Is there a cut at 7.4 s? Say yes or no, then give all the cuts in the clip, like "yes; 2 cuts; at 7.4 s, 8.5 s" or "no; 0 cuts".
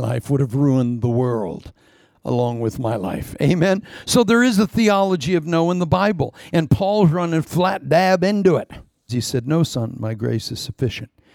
yes; 2 cuts; at 7.4 s, 9.1 s